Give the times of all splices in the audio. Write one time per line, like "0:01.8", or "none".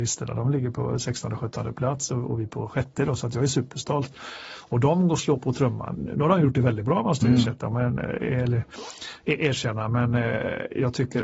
none